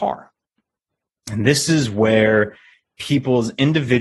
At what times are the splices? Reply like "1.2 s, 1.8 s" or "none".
1.2 s